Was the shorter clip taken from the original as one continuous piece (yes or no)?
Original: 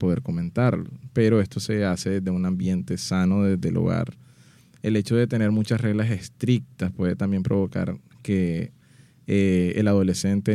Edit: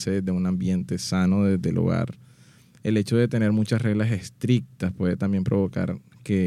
yes